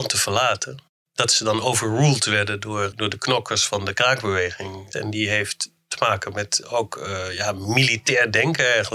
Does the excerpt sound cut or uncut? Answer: cut